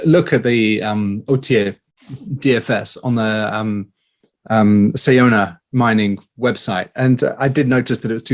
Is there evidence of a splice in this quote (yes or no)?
no